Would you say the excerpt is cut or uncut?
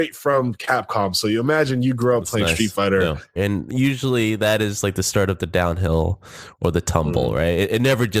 cut